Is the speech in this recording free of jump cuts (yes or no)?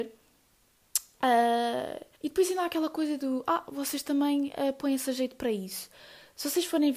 no